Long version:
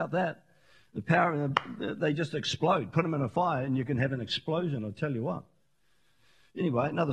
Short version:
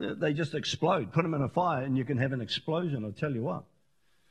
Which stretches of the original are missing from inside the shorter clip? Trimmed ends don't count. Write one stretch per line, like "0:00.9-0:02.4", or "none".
none